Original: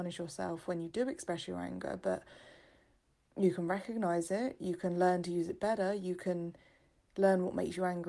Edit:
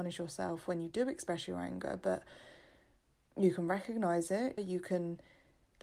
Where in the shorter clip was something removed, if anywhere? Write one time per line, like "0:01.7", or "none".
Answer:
0:04.6